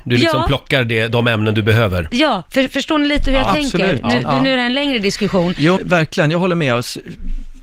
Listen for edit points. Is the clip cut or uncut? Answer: cut